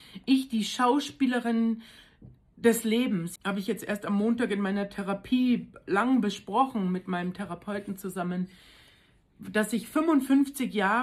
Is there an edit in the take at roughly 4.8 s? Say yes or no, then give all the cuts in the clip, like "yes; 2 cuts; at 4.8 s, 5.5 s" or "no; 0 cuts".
no; 1 cut; at 3.4 s